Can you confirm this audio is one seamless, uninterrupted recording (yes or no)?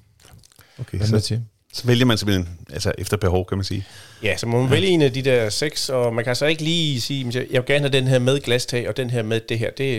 yes